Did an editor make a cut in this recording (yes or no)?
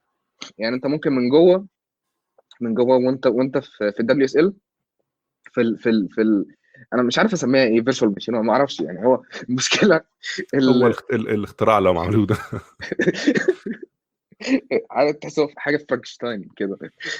no